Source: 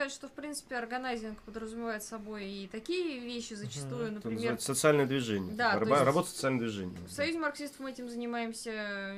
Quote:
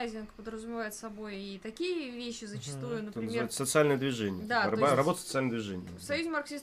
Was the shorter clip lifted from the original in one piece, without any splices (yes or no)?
yes